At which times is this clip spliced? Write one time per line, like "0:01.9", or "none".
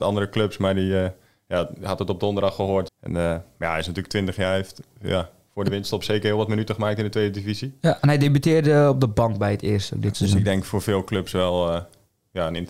0:02.9